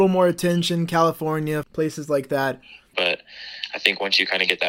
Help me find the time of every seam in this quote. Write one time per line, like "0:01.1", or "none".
0:01.6
0:02.9

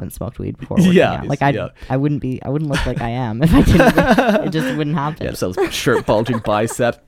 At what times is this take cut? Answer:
0:01.2
0:05.3

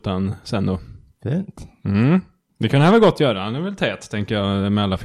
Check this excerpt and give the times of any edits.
none

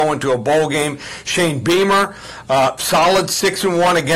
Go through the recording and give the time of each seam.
none

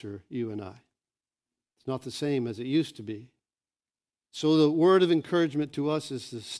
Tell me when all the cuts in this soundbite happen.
0:04.2

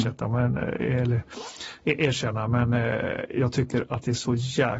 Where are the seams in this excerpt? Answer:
none

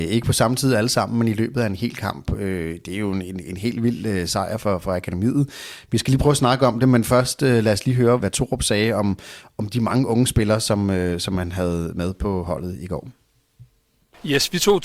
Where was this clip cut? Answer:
0:08.2

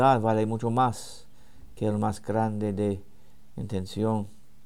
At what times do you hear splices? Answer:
none

